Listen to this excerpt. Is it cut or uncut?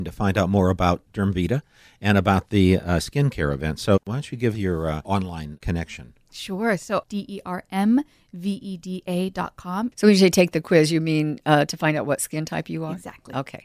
cut